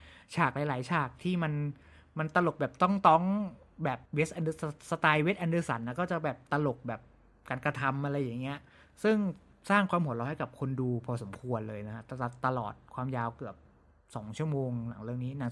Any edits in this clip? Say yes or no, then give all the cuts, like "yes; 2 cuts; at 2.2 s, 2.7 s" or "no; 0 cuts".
yes; 1 cut; at 4.1 s